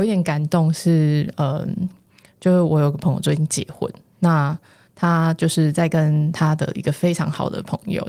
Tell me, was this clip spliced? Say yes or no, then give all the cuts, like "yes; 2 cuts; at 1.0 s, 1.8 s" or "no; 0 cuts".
no; 0 cuts